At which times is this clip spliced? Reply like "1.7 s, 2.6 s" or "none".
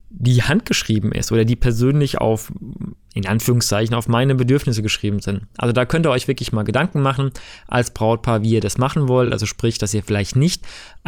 none